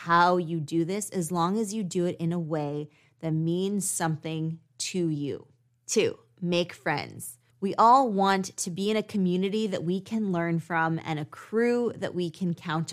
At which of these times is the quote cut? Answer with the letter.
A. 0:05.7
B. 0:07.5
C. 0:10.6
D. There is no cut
B